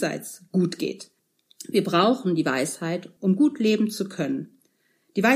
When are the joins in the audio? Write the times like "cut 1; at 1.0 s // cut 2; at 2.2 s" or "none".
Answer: cut 1; at 3.2 s